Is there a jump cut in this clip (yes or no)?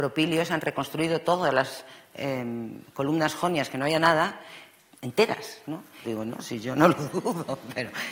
yes